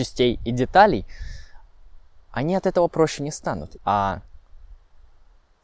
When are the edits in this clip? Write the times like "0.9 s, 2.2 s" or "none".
3.8 s